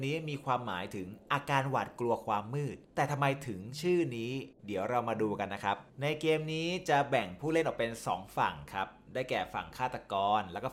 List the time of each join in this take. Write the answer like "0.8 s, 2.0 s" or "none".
2.8 s, 4.6 s